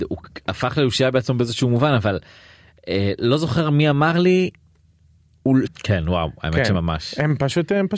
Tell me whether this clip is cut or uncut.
cut